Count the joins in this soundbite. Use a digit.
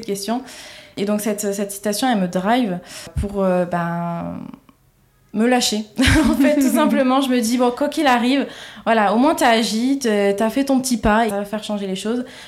1